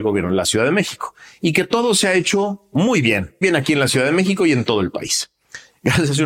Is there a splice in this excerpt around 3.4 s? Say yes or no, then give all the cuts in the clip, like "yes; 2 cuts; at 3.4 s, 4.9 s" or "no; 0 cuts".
yes; 1 cut; at 3.4 s